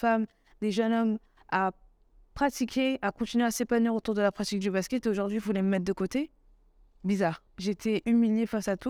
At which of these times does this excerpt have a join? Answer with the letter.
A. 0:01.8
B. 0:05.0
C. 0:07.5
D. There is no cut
C